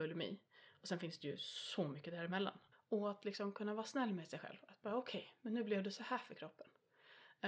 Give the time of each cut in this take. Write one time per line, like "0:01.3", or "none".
0:02.7